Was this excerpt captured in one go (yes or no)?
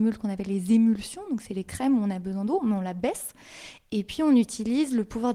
yes